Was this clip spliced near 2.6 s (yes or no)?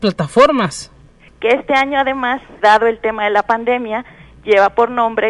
yes